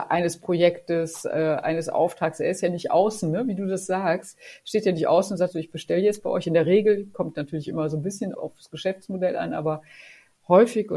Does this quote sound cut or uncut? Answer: cut